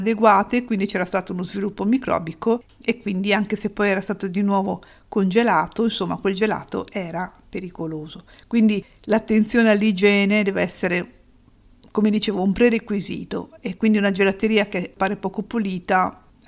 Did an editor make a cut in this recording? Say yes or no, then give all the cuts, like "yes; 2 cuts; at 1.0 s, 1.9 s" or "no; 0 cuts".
no; 0 cuts